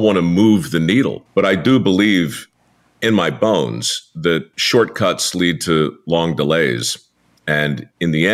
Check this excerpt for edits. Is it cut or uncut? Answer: cut